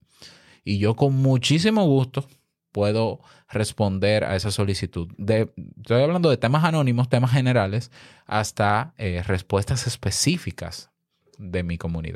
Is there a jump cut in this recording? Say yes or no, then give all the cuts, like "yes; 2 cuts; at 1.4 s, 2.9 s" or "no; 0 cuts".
no; 0 cuts